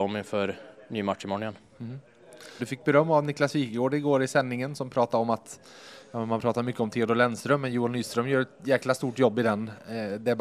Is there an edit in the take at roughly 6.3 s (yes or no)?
no